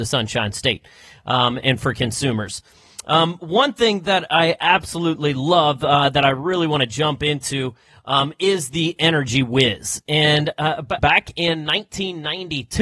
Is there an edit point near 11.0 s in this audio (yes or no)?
yes